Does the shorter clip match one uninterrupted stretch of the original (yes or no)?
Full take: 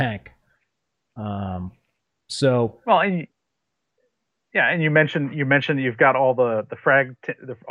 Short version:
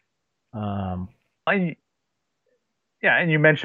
no